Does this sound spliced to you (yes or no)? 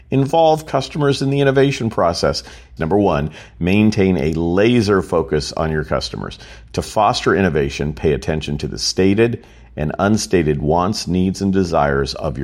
yes